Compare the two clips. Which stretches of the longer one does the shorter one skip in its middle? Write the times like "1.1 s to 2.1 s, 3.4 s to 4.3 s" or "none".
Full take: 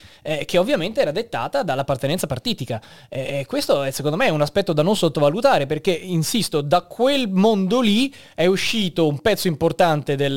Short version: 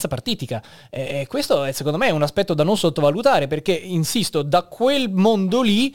none